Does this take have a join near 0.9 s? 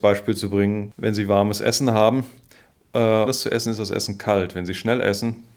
no; 1 cut; at 3.3 s

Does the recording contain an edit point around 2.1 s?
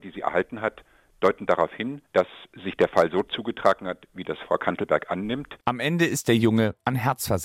yes; 1 cut; at 2.1 s

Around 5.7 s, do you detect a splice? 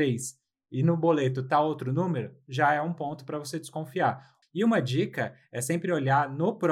no; 1 cut; at 4.4 s

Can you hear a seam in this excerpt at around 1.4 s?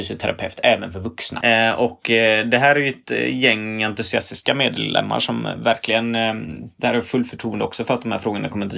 yes; 1 cut; at 1.4 s

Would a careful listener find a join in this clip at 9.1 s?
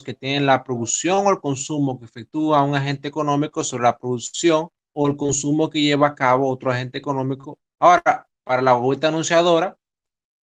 no; 1 cut; at 7.7 s

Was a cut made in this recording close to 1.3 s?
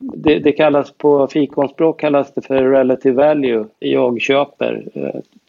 no; 1 cut; at 3.8 s

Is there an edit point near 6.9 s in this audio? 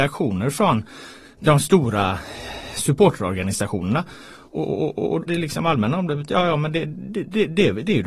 no; 1 cut; at 5.3 s

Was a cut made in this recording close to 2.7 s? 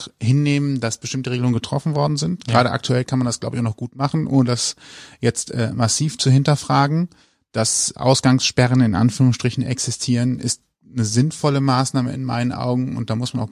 no; 0 cuts

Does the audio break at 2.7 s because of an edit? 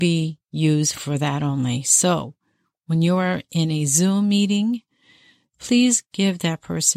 no; 0 cuts

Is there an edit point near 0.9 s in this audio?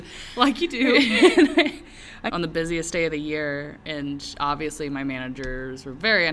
no; 1 cut; at 2.3 s

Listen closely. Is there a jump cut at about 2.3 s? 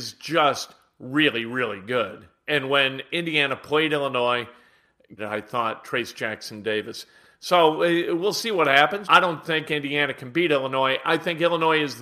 no; 2 cuts; at 5.2 s, 9.0 s

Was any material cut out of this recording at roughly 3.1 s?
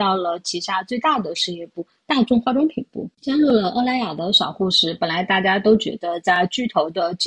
no; 0 cuts

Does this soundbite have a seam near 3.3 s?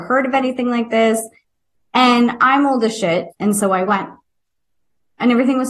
yes; 1 cut; at 3.3 s

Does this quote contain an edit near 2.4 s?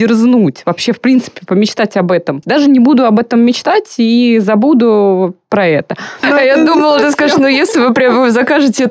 yes; 2 cuts; at 2.4 s, 6.2 s

